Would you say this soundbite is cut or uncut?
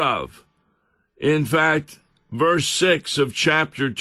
uncut